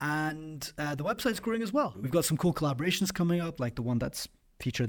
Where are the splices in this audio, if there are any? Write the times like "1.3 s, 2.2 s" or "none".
1.9 s, 3.6 s